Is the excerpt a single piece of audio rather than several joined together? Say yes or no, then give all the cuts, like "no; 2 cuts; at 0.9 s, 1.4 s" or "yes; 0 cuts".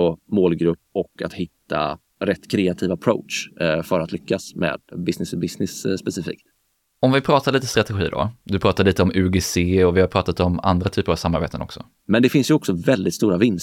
no; 2 cuts; at 8.4 s, 12.0 s